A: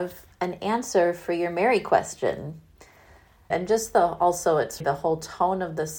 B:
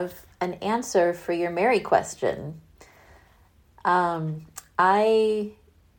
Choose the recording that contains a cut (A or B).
A